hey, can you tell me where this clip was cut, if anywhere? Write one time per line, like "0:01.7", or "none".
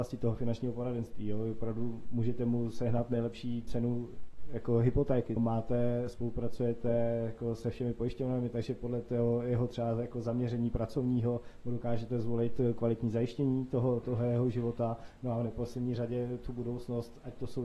0:05.4